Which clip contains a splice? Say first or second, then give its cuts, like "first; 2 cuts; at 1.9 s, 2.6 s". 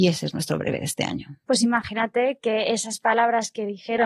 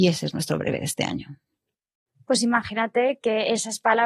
first; 1 cut; at 1.4 s